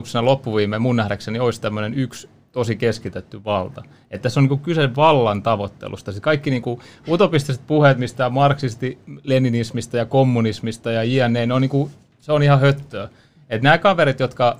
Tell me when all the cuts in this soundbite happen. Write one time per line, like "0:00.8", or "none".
none